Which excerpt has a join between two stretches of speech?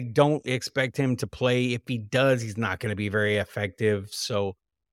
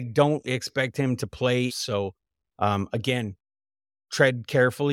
second; 1 cut; at 1.7 s

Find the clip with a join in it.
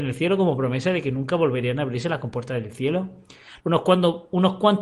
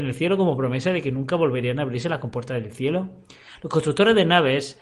first; 1 cut; at 3.6 s

